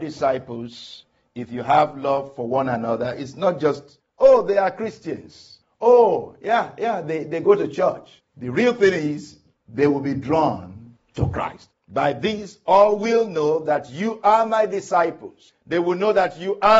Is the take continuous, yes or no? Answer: yes